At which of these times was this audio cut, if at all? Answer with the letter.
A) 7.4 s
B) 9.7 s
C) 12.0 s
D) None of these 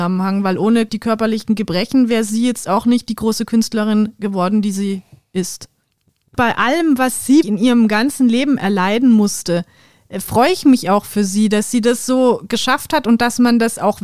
A